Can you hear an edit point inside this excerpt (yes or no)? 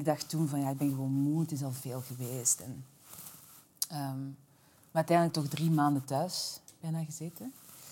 no